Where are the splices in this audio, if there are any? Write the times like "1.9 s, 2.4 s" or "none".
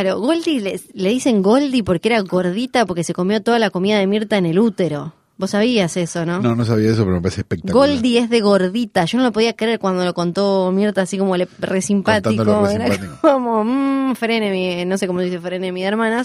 none